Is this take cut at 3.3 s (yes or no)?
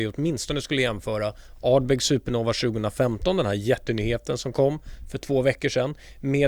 no